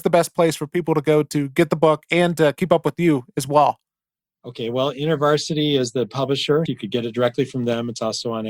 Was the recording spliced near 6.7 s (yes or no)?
yes